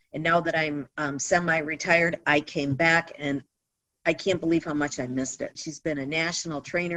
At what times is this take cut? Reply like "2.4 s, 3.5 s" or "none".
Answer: 5.5 s